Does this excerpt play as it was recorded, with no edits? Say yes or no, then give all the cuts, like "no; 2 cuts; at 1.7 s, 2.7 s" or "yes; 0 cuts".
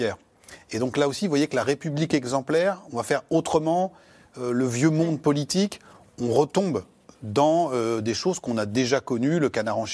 yes; 0 cuts